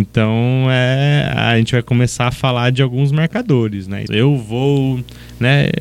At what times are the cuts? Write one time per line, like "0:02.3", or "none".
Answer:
0:04.1